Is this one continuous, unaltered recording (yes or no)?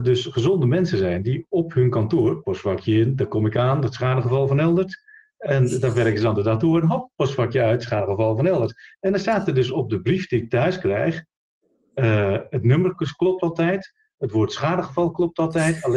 yes